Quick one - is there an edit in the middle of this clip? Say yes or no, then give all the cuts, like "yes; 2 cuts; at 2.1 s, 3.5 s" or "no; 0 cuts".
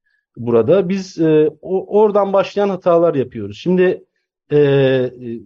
no; 0 cuts